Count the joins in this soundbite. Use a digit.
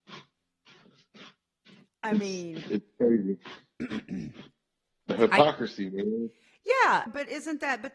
1